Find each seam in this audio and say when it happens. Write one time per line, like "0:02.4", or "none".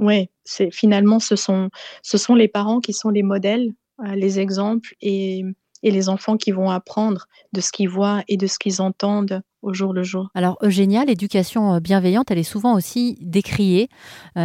none